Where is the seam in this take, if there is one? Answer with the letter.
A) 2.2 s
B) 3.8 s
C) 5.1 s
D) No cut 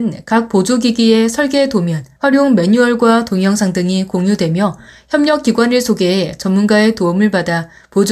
A